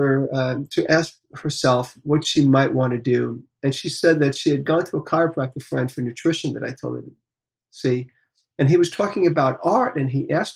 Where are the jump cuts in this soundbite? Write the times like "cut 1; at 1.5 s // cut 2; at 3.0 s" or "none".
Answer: none